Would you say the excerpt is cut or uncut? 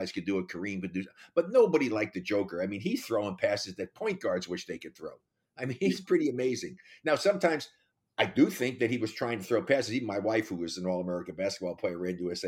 uncut